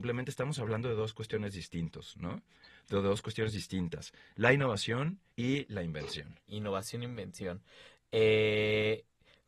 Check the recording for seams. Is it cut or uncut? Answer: cut